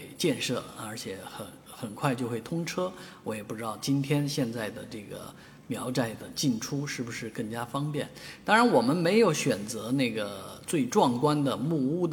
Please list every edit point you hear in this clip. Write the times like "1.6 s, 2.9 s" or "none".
none